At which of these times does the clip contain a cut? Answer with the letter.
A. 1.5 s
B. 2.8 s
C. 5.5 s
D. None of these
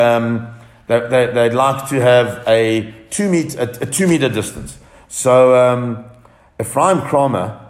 D